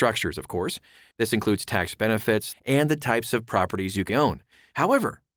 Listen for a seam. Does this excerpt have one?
yes; 3 cuts; at 1.1 s, 2.5 s, 4.1 s

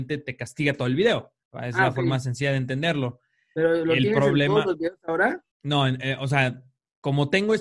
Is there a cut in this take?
yes; 1 cut; at 5.5 s

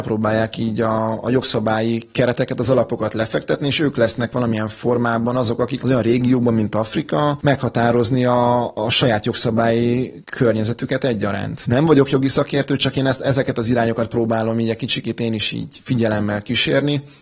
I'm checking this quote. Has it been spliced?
no; 0 cuts

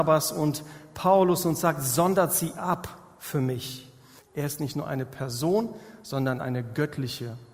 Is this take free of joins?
no; 1 cut; at 4.2 s

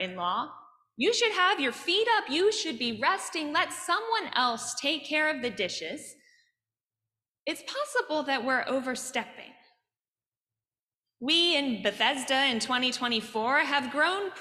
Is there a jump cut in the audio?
no; 0 cuts

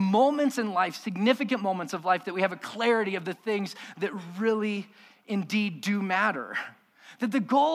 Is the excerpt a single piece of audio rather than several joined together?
yes; 0 cuts

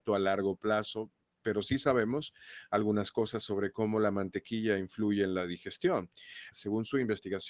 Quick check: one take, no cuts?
no; 1 cut; at 6.5 s

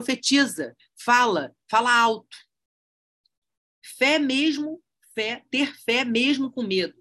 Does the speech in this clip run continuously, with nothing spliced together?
yes; 0 cuts

